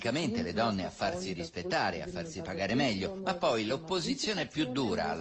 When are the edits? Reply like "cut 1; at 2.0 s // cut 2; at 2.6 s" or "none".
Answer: none